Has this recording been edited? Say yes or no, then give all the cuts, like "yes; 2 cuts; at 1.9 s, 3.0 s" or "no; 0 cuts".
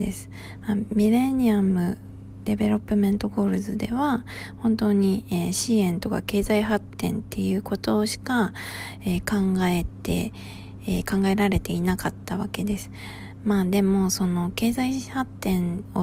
no; 0 cuts